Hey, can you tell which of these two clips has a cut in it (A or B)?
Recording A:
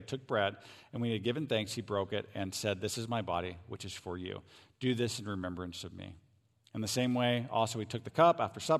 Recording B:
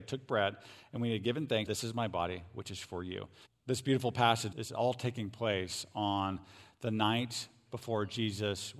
B